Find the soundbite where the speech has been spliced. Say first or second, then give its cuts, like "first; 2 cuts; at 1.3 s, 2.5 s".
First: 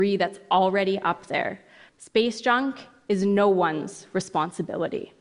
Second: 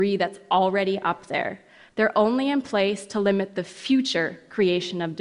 first; 1 cut; at 1.9 s